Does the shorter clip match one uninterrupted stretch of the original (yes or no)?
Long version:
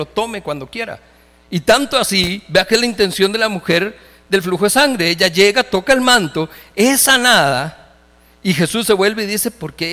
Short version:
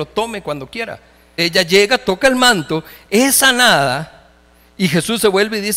no